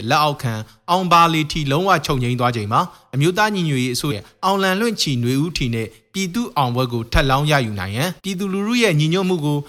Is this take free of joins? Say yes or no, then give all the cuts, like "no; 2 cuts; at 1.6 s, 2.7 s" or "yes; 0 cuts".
no; 2 cuts; at 4.1 s, 8.2 s